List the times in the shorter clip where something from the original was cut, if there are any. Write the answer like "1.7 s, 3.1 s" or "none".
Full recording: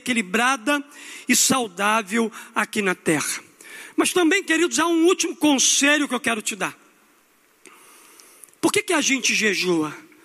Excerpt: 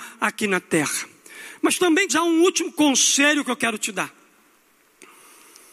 2.1 s